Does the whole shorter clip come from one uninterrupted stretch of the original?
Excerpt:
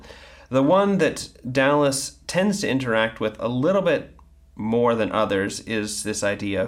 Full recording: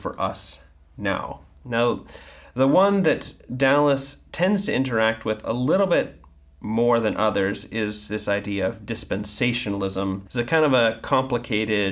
yes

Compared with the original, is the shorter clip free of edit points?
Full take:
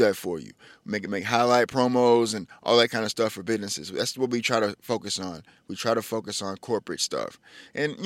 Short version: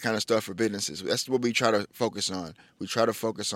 yes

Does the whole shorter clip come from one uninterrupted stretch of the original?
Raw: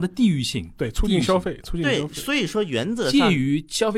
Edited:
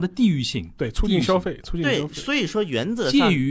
yes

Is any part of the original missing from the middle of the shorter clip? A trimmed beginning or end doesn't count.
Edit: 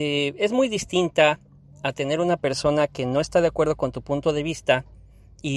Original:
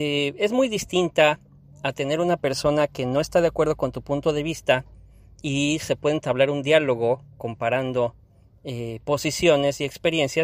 no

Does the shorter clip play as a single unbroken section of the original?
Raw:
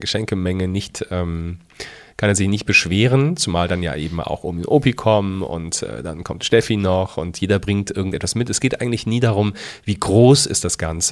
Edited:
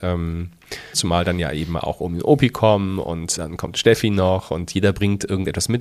no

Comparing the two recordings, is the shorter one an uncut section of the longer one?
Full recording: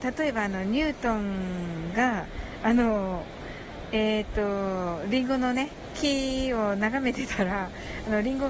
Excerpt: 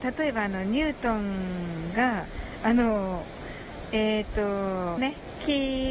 no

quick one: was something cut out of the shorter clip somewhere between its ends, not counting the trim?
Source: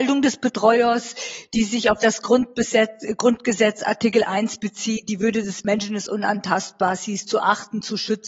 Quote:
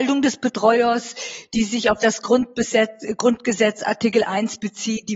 no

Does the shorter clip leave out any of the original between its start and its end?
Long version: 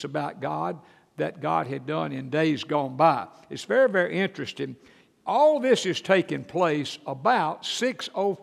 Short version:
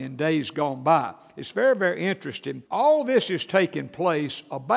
yes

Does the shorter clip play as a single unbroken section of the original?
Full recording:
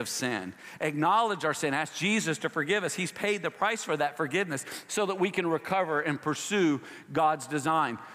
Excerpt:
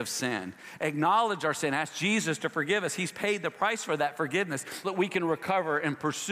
no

